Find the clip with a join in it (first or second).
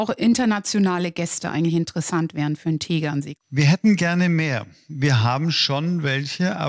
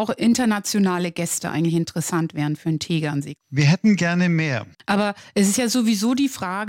second